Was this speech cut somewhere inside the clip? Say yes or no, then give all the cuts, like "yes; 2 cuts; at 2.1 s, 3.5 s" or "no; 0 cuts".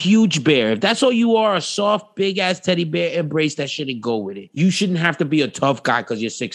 no; 0 cuts